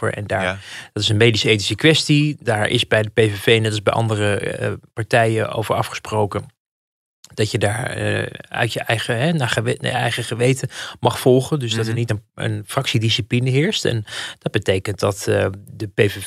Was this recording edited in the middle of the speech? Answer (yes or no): no